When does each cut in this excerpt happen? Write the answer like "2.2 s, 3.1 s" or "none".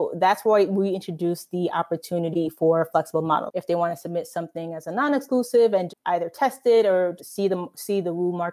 3.5 s, 5.9 s, 7.2 s